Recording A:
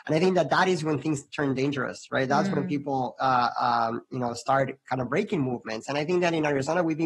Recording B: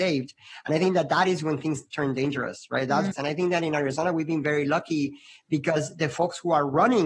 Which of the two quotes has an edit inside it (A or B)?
B